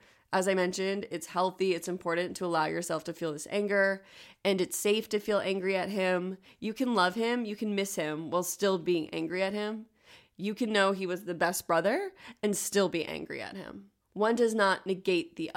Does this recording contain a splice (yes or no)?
no